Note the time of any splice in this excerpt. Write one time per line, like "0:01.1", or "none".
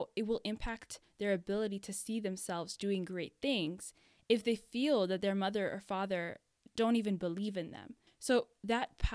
0:08.1

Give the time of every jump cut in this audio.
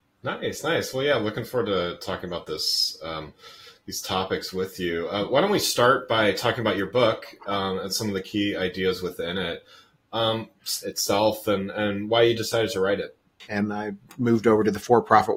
0:10.8
0:13.4

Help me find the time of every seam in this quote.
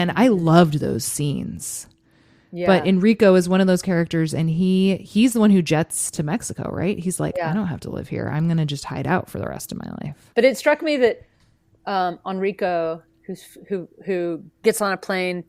0:10.3

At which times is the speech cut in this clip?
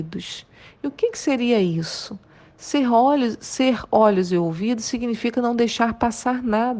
none

